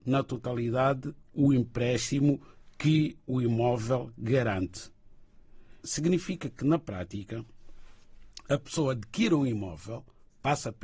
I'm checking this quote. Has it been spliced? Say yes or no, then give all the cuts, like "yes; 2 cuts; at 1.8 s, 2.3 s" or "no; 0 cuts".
yes; 1 cut; at 5.8 s